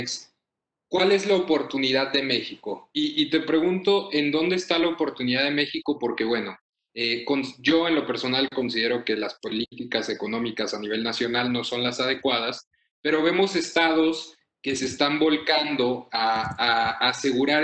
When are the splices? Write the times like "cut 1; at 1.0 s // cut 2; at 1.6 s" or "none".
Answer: none